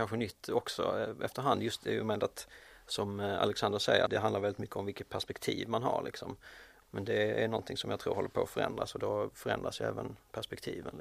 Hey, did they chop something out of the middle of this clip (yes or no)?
yes